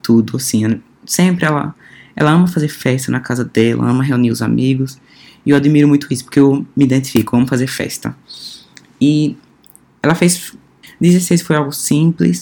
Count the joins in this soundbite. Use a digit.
1